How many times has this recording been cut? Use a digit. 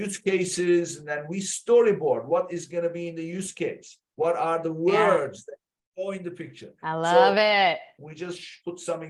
1